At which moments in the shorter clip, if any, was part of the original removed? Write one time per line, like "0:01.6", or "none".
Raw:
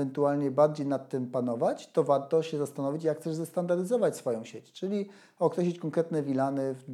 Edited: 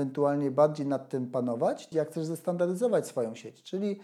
0:01.9